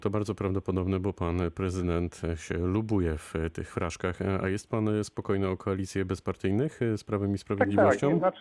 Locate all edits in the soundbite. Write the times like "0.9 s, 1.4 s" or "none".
none